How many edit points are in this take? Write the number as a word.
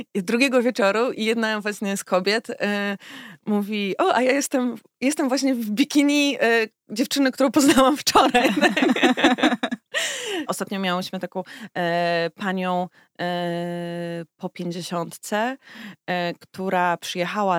one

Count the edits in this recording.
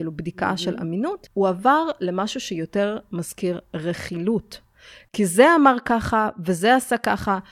zero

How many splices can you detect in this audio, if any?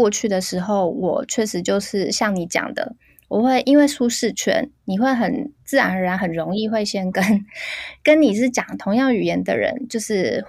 zero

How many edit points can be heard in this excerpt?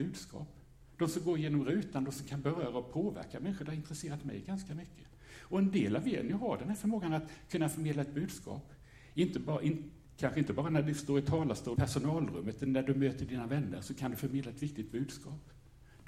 one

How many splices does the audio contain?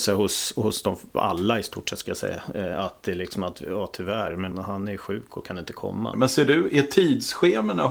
two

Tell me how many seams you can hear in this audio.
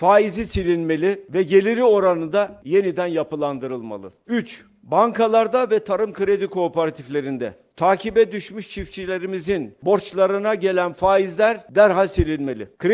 one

